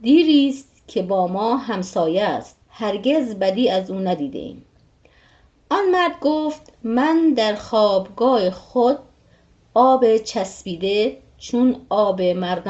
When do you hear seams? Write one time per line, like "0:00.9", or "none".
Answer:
0:02.6